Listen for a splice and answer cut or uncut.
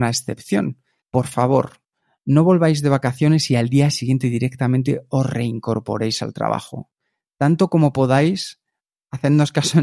cut